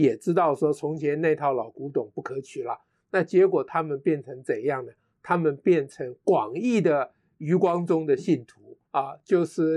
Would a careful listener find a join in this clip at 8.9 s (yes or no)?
yes